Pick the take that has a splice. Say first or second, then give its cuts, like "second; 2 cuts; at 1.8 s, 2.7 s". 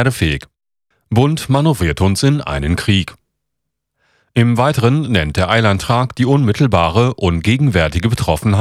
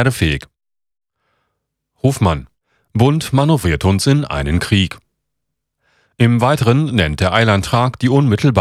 first; 1 cut; at 0.9 s